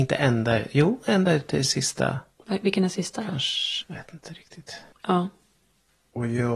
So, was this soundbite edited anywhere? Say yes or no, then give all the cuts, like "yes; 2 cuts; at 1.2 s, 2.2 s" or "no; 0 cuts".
yes; 2 cuts; at 3.8 s, 4.9 s